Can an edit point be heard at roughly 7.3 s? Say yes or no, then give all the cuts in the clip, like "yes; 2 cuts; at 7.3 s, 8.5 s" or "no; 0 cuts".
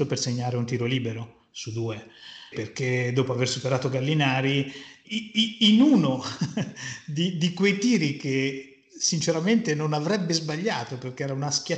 no; 2 cuts; at 2.5 s, 5.0 s